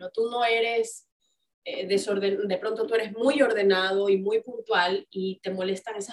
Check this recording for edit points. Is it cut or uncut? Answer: uncut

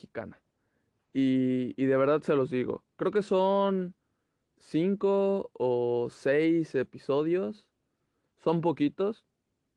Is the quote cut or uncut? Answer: uncut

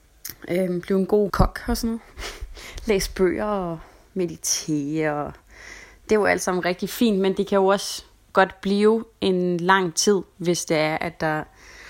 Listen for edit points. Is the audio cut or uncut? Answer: uncut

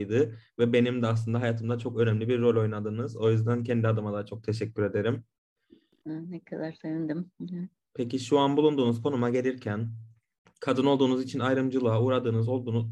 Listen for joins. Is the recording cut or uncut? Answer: cut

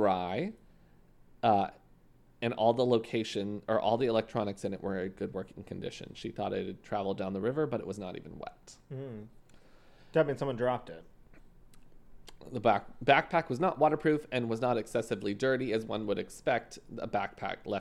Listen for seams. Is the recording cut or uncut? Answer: uncut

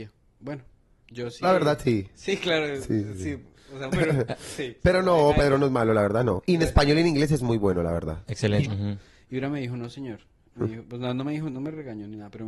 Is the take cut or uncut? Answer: cut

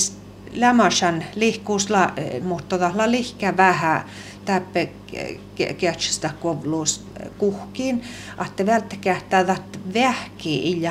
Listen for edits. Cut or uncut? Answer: cut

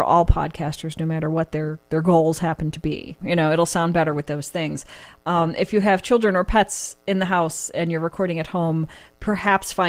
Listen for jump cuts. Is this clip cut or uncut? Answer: cut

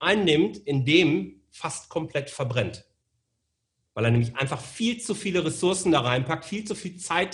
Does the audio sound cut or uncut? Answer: uncut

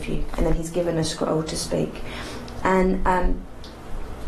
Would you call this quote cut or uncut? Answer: uncut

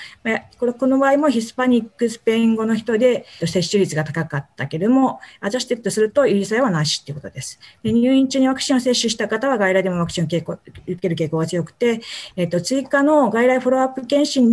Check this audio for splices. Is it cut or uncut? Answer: cut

